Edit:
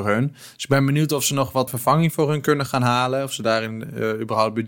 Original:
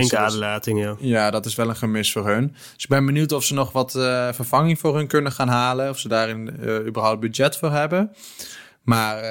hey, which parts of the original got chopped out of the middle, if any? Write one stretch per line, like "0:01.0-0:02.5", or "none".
0:03.9-0:04.3